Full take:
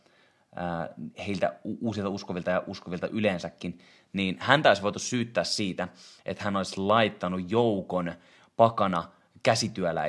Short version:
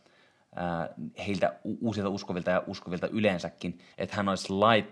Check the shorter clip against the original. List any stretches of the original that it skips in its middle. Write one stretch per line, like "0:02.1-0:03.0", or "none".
0:03.9-0:06.2